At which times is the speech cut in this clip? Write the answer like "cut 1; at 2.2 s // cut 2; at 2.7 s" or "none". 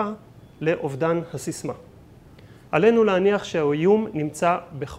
cut 1; at 2.7 s